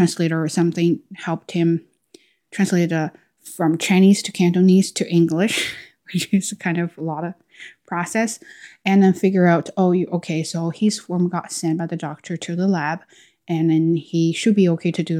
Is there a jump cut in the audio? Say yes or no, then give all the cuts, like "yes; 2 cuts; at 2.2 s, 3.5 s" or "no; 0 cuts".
no; 0 cuts